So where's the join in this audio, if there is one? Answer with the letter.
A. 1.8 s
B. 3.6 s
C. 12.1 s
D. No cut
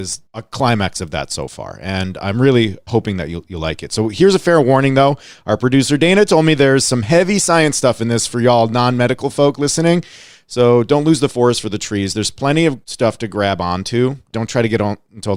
D